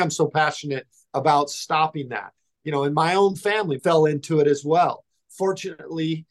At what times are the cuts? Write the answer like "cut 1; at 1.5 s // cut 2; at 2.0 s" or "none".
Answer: cut 1; at 3.8 s